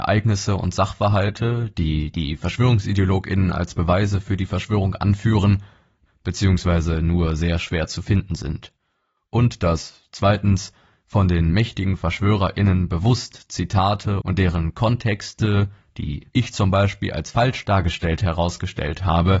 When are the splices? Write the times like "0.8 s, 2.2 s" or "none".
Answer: 6.1 s